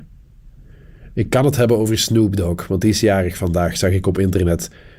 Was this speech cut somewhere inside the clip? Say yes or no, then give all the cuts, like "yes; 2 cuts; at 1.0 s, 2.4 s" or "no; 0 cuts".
no; 0 cuts